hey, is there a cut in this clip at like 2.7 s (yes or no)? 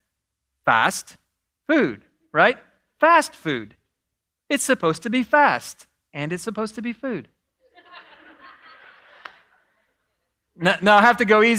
no